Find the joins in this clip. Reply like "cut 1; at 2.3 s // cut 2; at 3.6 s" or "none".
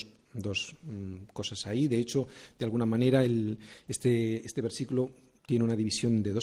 none

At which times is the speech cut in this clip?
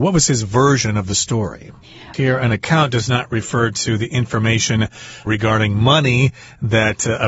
cut 1; at 2.1 s

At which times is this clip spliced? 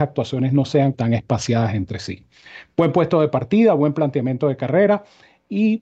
cut 1; at 0.9 s

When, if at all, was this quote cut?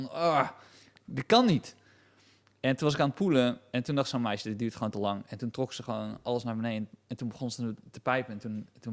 none

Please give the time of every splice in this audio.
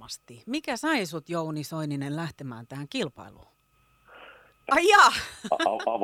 cut 1; at 4.6 s

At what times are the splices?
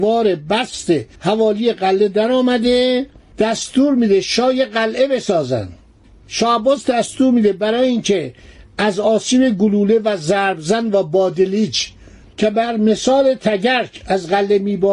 cut 1; at 1.1 s

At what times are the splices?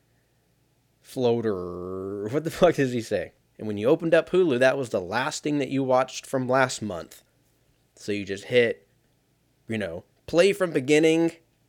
cut 1; at 3.4 s

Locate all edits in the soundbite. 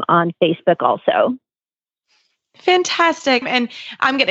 cut 1; at 3.4 s

